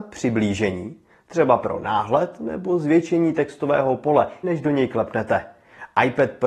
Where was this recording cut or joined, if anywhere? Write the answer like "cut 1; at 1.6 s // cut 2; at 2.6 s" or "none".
cut 1; at 4.4 s